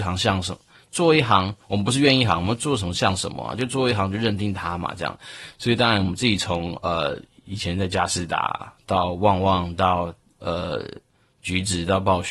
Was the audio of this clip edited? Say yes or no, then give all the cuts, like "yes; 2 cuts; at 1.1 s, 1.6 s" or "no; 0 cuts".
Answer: no; 0 cuts